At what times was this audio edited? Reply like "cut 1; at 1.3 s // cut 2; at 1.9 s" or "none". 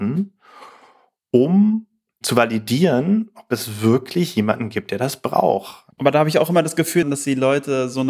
cut 1; at 5.9 s // cut 2; at 7.0 s